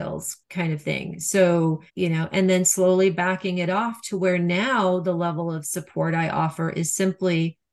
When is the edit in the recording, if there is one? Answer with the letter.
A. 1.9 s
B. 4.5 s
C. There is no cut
A